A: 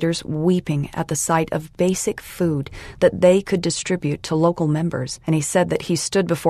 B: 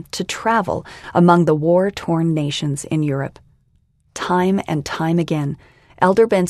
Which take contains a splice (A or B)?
A